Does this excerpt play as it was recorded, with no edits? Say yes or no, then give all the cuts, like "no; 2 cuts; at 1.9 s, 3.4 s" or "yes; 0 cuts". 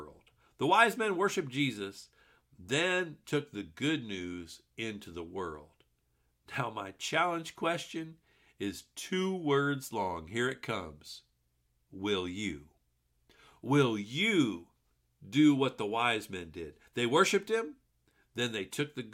yes; 0 cuts